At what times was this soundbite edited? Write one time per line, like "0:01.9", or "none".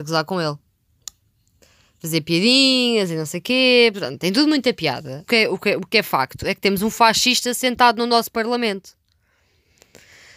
0:03.9
0:05.3